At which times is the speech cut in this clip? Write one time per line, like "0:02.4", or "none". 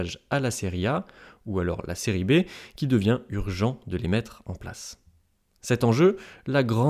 none